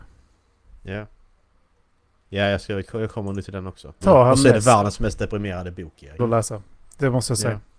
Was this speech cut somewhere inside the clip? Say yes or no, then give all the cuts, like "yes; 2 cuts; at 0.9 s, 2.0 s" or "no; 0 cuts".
yes; 2 cuts; at 4.0 s, 6.2 s